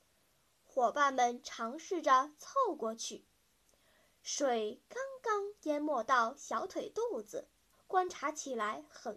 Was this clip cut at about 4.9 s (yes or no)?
no